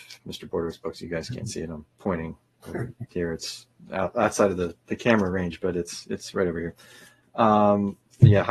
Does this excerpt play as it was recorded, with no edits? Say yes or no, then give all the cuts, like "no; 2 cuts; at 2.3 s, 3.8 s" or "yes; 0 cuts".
yes; 0 cuts